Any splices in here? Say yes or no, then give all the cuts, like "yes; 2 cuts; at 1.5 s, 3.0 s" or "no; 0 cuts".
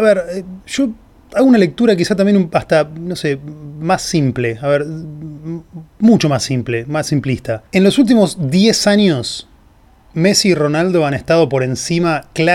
yes; 1 cut; at 7.7 s